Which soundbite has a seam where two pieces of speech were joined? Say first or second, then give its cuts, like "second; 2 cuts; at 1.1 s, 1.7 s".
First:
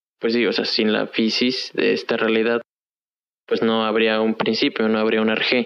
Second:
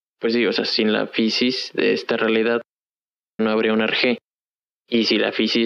second; 1 cut; at 3.4 s